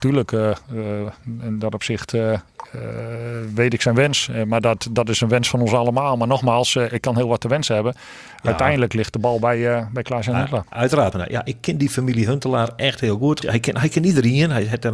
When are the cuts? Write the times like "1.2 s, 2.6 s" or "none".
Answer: 11.1 s, 13.4 s